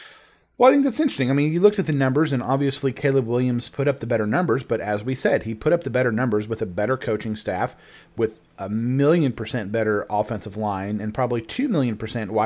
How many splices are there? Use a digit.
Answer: 0